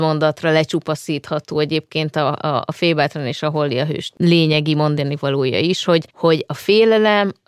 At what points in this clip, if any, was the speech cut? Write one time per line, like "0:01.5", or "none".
0:06.1